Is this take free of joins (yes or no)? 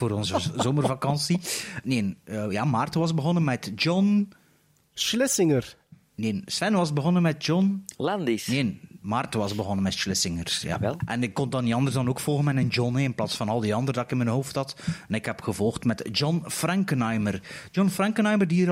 no